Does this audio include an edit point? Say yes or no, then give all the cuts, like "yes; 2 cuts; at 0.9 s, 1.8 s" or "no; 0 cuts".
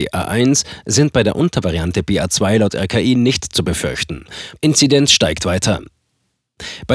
yes; 1 cut; at 4.6 s